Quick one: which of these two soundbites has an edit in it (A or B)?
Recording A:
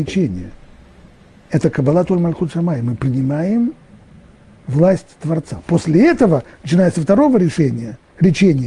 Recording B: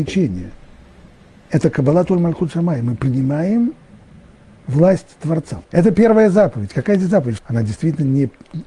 B